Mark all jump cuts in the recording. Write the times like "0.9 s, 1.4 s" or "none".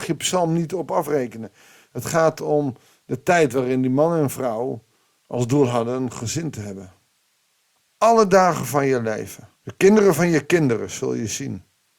7.8 s, 9.6 s